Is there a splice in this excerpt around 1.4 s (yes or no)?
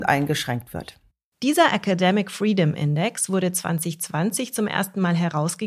no